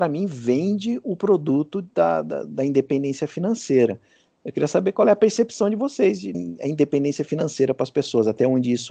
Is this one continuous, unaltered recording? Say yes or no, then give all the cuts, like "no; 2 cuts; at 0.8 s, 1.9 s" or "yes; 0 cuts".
no; 1 cut; at 6.3 s